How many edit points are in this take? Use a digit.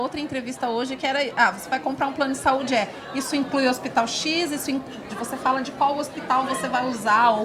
1